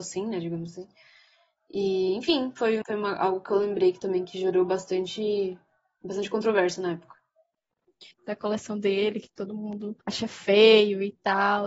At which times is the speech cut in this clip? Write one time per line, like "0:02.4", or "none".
0:02.8
0:08.1
0:10.0